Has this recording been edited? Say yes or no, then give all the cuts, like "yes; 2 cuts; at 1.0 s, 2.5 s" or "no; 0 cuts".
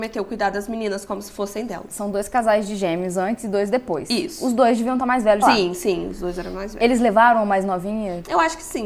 yes; 1 cut; at 5.4 s